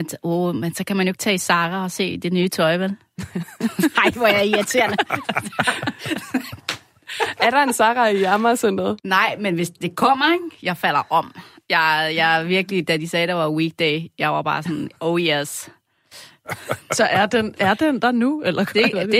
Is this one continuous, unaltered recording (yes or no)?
no